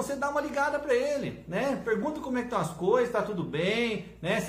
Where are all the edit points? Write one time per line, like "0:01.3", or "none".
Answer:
none

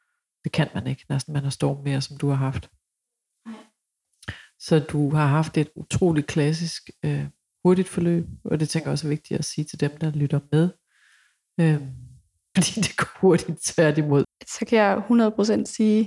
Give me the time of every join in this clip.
0:12.6
0:14.2

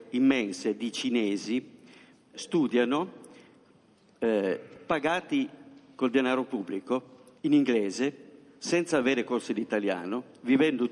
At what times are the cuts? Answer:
0:02.3
0:07.4

